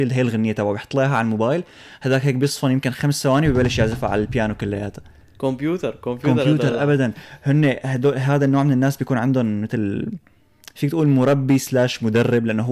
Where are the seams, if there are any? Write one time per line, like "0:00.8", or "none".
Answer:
none